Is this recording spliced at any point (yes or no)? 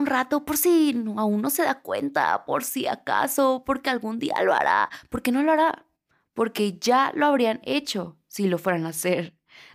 no